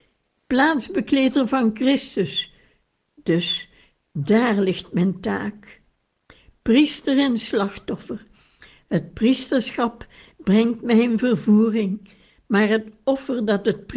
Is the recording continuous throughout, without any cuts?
yes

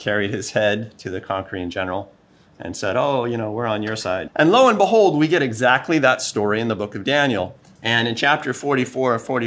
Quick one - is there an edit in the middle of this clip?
yes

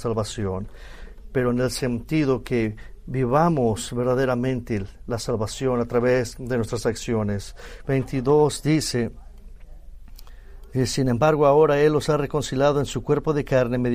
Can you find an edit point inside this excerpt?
yes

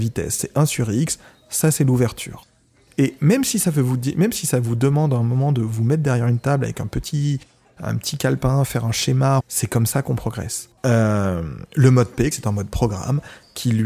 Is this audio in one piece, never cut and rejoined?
no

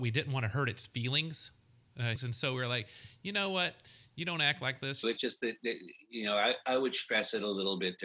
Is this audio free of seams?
no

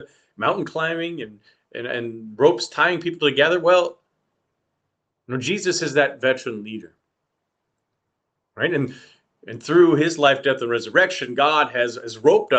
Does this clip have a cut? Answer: no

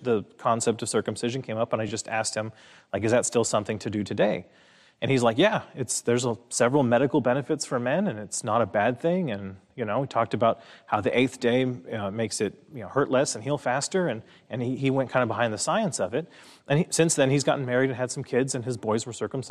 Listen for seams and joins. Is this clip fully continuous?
yes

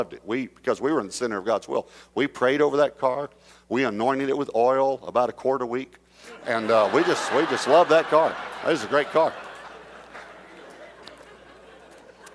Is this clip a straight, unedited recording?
yes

